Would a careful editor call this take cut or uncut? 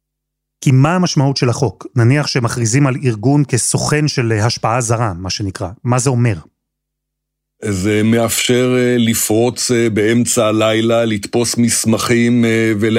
uncut